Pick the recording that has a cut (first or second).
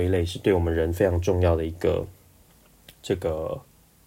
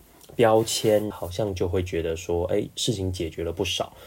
second